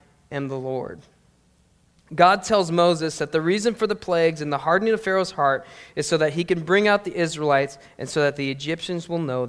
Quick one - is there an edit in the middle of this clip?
no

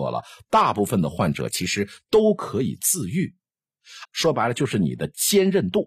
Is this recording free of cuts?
no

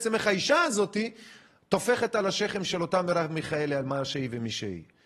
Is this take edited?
no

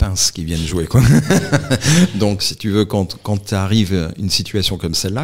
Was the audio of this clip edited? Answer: yes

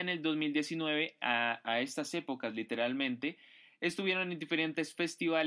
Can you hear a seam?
no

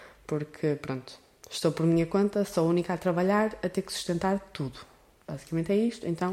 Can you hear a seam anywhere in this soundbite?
no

